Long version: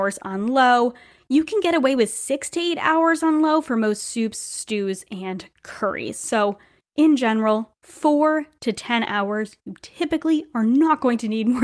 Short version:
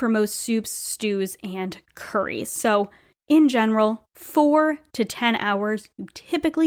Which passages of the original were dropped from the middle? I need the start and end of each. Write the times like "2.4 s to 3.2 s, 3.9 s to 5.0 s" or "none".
none